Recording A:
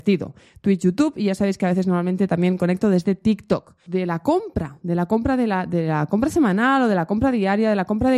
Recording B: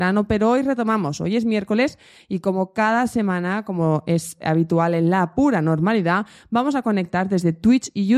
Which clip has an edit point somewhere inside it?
A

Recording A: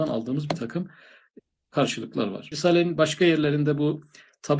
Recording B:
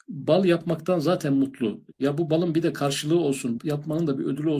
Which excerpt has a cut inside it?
B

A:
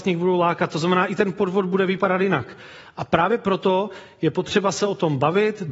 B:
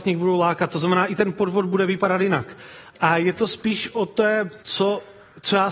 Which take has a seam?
B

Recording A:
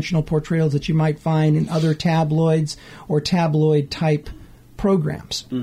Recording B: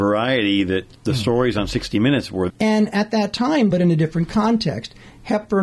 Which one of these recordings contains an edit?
B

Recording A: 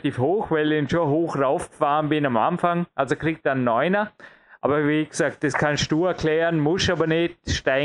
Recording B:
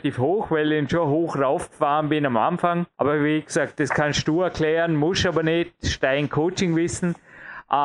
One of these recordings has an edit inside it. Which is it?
B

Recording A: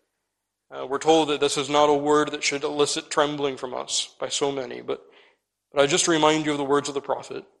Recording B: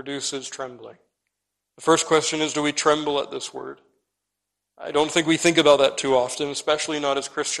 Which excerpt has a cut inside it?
B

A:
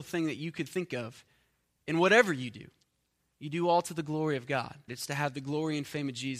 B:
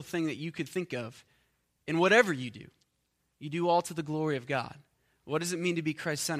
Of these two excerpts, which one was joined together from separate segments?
A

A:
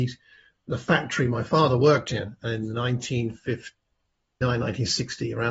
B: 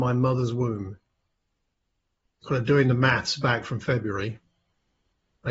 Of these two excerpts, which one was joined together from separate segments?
A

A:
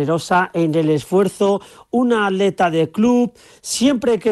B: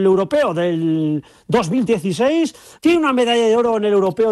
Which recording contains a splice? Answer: B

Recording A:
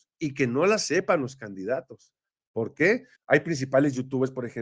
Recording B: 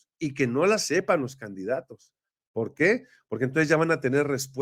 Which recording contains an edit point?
A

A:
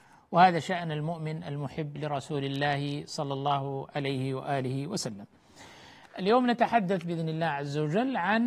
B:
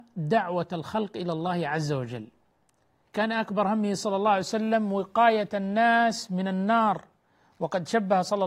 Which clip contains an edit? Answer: B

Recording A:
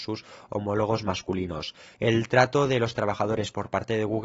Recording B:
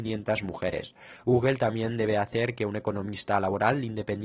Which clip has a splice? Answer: A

